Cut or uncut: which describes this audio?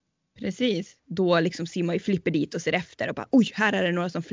cut